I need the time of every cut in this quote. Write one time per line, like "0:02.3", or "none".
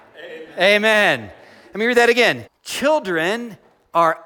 0:02.5